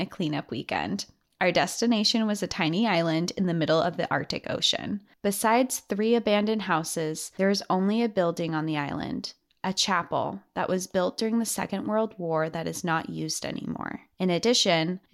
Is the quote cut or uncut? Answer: cut